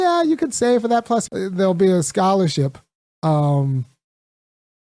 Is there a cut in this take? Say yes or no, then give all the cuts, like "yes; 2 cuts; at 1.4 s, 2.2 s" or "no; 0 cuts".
yes; 1 cut; at 1.3 s